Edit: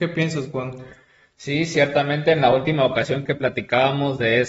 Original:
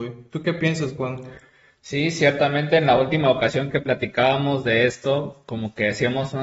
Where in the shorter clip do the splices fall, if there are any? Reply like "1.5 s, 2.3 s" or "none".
none